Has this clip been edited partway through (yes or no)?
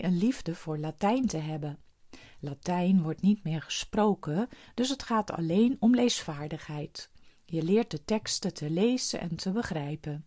no